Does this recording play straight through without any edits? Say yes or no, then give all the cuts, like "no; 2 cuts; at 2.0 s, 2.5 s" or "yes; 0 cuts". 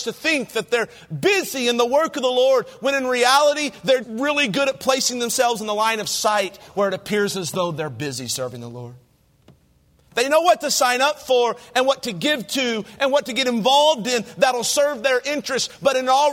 no; 1 cut; at 4.0 s